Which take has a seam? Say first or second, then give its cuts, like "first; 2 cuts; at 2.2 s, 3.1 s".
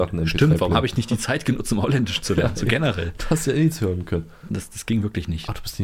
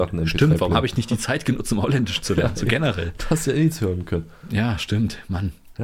first; 1 cut; at 4.5 s